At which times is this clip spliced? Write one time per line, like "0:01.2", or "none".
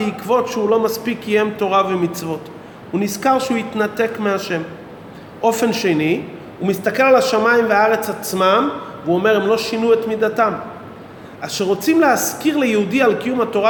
none